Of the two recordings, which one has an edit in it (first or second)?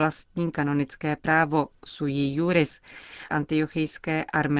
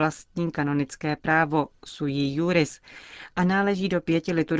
first